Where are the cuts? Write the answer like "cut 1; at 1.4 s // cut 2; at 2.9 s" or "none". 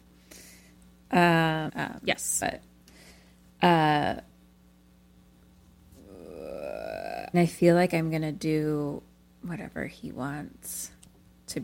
cut 1; at 1.7 s // cut 2; at 7.3 s